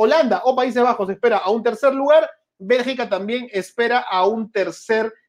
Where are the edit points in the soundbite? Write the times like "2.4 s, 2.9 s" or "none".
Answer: none